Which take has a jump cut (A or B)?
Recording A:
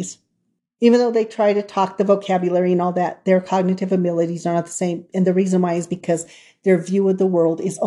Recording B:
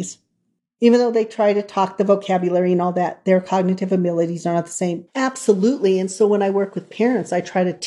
B